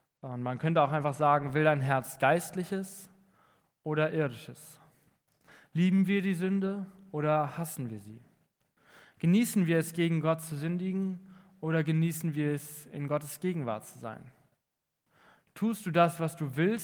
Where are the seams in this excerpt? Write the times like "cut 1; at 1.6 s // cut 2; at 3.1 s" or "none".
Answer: none

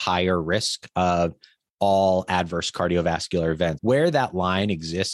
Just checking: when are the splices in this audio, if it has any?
cut 1; at 3.8 s

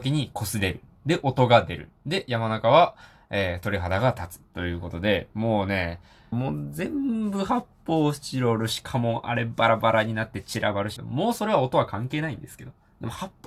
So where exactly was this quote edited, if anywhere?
cut 1; at 6.3 s // cut 2; at 11.0 s

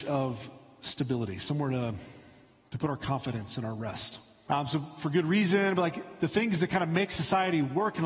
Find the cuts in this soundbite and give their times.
cut 1; at 4.4 s

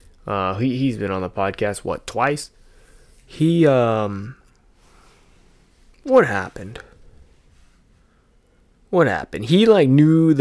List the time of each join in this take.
none

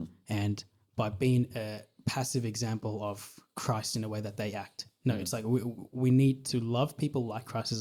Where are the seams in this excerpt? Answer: none

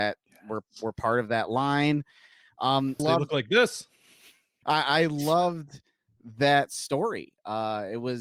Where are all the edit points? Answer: cut 1; at 3.0 s // cut 2; at 4.6 s

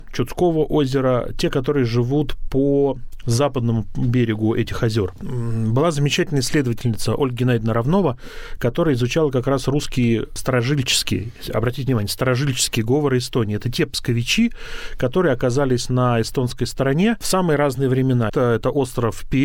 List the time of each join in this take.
cut 1; at 18.3 s

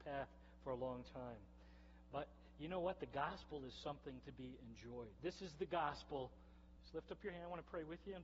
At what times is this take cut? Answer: cut 1; at 5.2 s // cut 2; at 6.8 s

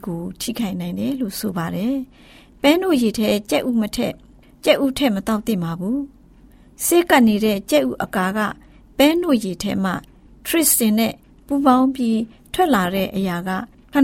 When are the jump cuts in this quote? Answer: none

